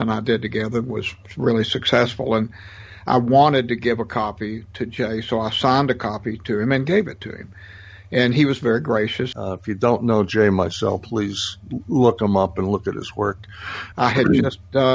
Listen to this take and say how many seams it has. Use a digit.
2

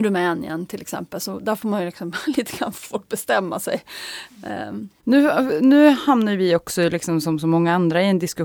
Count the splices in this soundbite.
0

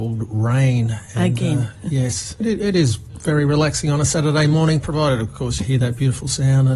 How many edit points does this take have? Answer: 2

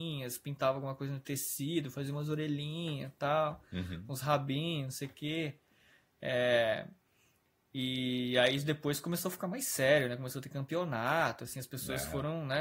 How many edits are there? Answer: 0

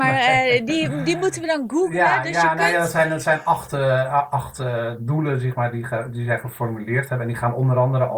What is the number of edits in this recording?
0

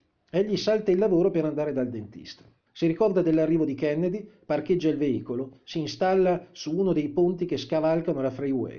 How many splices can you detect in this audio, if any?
1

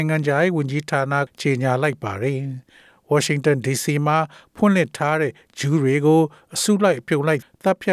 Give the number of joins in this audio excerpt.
1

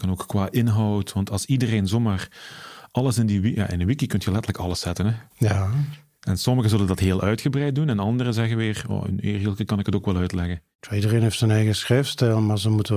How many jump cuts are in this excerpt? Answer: 0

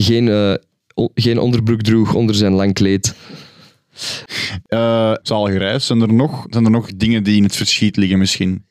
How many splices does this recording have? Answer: 2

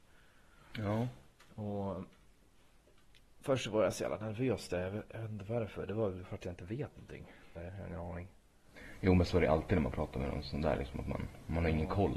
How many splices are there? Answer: 1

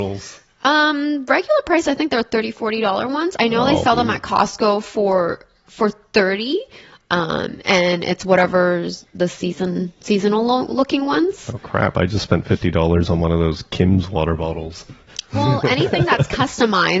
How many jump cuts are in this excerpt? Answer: 0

